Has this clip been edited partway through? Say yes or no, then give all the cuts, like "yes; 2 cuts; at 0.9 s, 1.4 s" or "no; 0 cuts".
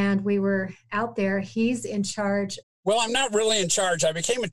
yes; 1 cut; at 2.6 s